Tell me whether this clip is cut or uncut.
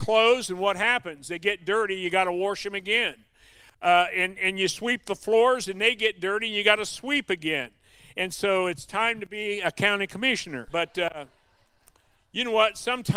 cut